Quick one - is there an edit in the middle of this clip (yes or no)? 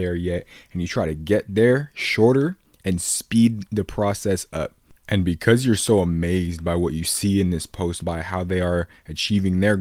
yes